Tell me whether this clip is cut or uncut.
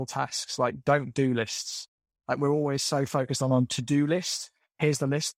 uncut